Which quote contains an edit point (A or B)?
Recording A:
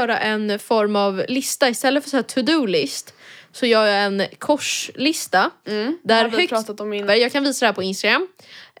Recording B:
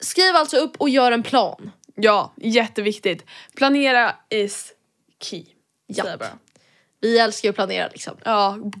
A